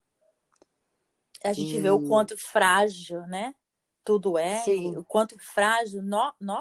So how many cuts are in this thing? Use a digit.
0